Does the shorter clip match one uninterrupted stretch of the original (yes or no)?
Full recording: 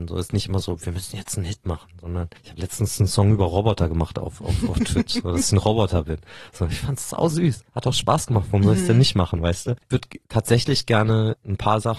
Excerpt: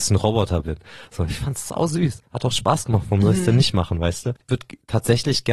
yes